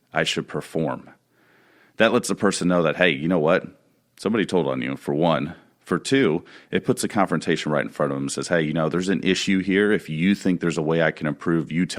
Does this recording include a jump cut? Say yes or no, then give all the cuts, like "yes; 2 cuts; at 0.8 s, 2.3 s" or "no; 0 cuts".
no; 0 cuts